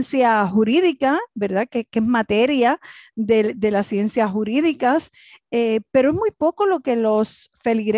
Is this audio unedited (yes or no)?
yes